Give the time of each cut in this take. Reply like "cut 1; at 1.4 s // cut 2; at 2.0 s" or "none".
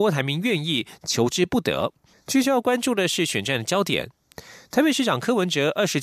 cut 1; at 2.1 s